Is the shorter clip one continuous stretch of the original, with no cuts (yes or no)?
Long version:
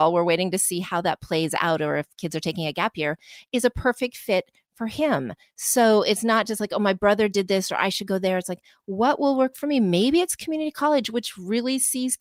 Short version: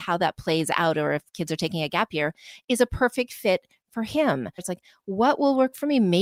no